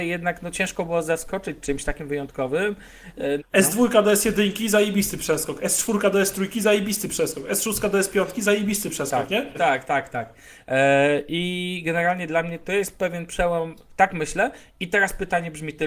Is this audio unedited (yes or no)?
no